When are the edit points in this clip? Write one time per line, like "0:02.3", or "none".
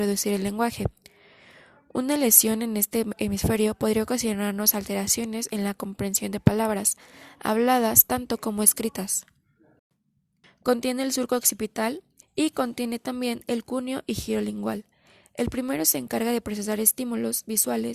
0:10.4
0:12.2